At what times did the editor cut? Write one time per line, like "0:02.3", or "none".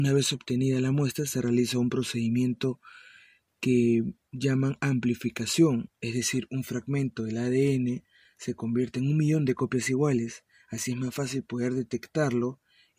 none